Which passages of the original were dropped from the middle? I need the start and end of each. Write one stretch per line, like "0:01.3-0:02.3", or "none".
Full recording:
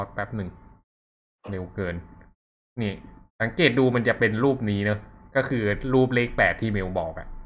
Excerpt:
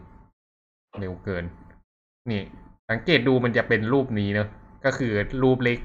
none